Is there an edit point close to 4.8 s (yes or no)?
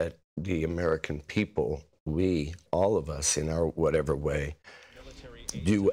no